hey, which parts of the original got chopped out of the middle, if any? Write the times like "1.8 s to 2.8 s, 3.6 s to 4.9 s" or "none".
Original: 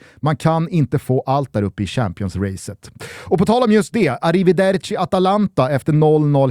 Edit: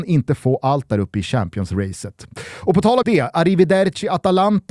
3.7 s to 3.9 s